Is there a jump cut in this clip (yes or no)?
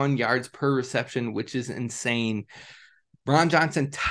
no